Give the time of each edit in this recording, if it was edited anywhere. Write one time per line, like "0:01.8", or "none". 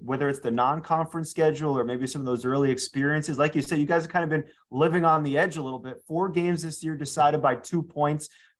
none